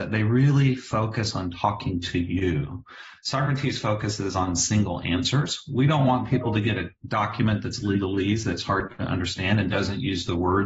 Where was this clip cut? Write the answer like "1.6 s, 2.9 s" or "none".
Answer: none